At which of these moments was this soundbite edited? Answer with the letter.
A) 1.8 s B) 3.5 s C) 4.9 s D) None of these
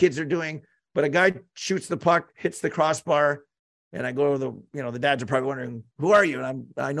D